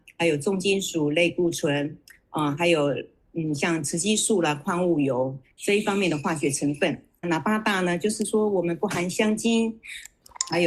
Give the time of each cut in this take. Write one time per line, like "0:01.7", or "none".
0:07.2